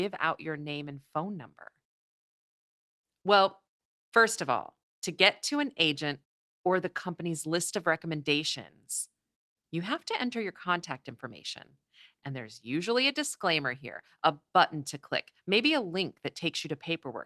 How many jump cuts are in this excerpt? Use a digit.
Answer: 0